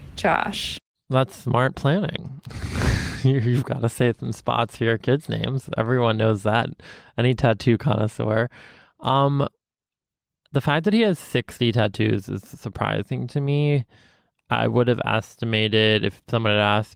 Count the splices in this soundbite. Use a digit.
0